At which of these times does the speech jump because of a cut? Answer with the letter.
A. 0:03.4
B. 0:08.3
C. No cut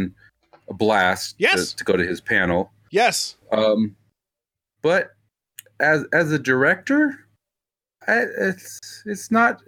C